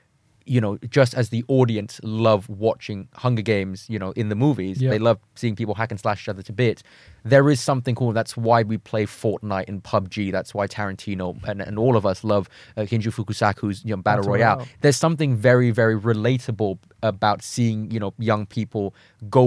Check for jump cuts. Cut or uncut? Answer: uncut